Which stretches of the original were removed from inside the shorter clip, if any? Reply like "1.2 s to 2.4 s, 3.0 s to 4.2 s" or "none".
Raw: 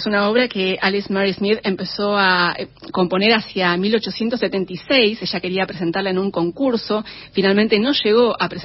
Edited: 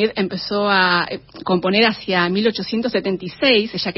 none